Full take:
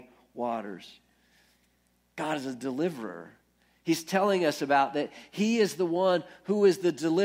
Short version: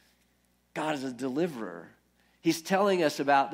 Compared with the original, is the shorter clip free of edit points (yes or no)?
yes